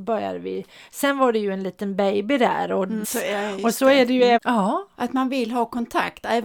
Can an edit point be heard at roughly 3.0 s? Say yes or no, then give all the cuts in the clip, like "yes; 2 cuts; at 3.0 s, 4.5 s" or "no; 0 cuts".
yes; 2 cuts; at 3.0 s, 4.4 s